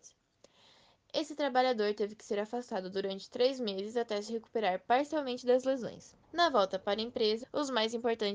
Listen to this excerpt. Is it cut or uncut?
cut